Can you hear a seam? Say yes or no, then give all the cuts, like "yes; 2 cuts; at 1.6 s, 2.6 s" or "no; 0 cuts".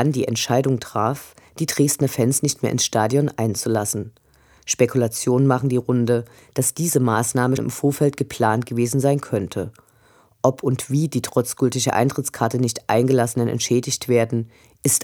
yes; 1 cut; at 7.6 s